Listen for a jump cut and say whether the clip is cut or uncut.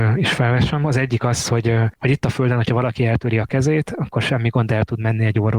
uncut